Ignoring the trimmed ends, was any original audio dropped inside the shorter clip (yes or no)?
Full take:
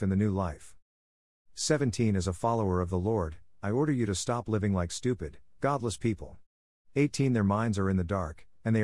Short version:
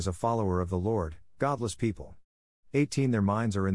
yes